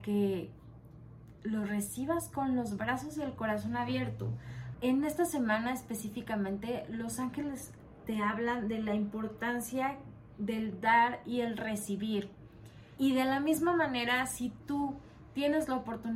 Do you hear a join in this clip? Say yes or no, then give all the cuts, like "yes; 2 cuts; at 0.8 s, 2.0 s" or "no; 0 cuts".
yes; 2 cuts; at 4.7 s, 13.0 s